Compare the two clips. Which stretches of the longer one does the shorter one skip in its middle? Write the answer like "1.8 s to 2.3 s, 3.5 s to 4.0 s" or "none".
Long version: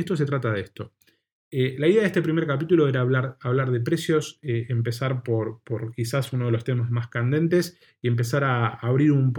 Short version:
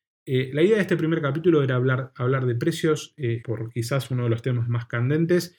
4.7 s to 5.6 s